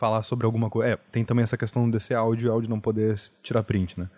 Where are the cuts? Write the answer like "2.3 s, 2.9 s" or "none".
none

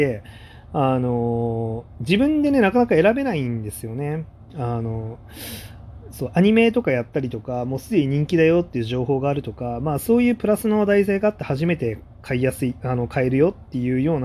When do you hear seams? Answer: none

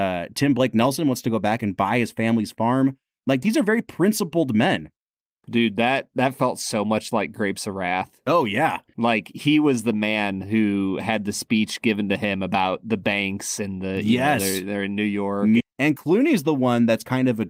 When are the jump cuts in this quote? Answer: 15.6 s

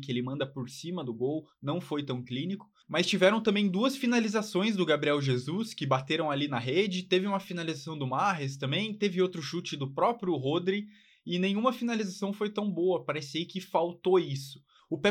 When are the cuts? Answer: none

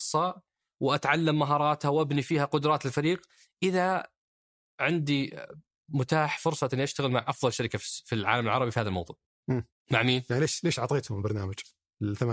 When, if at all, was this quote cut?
9.8 s

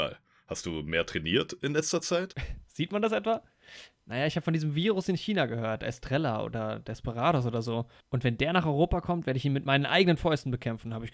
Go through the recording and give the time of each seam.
none

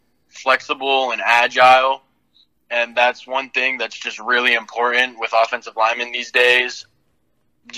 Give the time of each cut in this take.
none

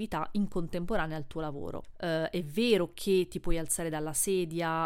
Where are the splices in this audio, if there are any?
1.9 s

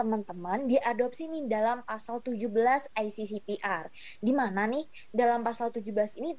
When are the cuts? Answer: none

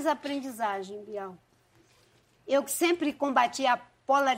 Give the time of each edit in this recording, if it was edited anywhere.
2.4 s

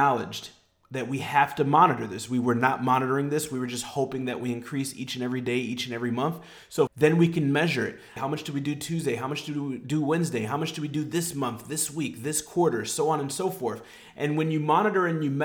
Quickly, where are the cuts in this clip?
6.9 s, 8.2 s

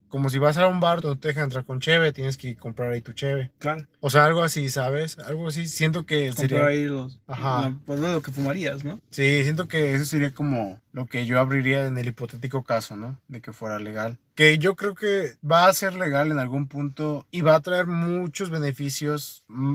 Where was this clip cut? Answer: 1.0 s

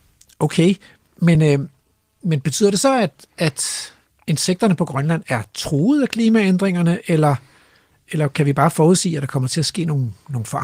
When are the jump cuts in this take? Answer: none

